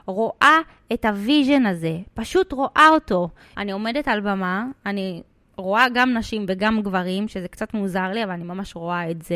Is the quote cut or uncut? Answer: cut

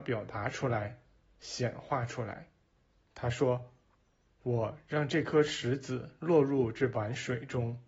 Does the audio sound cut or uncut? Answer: cut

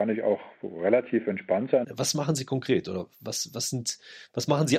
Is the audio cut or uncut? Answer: cut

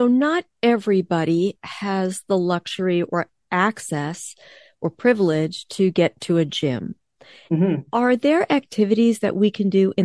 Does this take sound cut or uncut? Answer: cut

